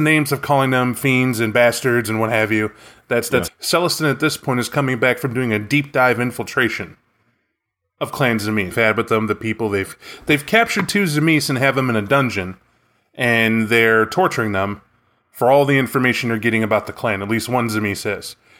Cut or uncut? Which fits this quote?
cut